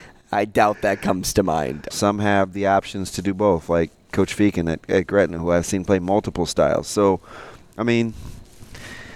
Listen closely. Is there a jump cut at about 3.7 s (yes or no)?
no